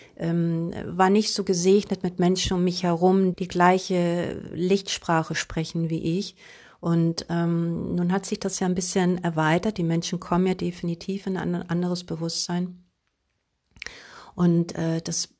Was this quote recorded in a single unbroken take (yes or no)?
no